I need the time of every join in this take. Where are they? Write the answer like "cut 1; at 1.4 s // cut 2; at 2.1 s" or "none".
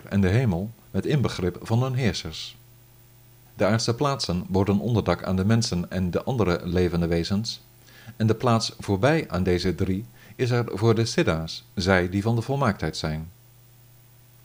cut 1; at 3.5 s